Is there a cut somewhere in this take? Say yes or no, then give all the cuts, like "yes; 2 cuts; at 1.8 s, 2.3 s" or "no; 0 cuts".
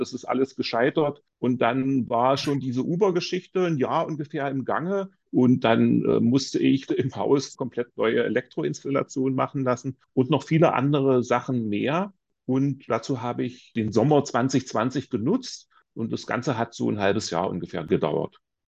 yes; 2 cuts; at 5.2 s, 6.9 s